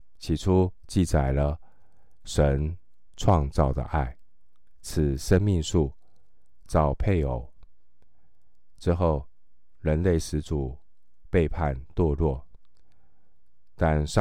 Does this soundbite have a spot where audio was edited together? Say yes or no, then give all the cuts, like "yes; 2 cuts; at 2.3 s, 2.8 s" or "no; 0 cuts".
yes; 1 cut; at 4.8 s